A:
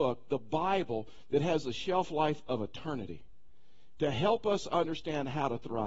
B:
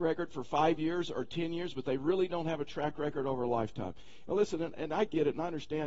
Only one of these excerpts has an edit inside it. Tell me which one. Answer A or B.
B